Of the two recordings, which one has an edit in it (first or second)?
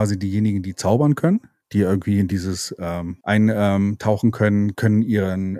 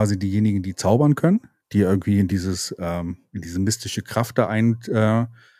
first